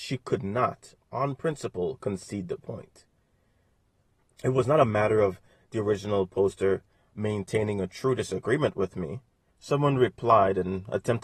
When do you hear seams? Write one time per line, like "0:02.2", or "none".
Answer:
0:04.3
0:09.5